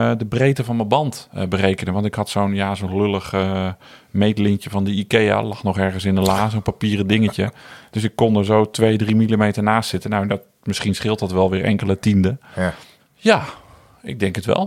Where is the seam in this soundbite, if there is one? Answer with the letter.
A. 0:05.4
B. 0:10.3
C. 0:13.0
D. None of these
C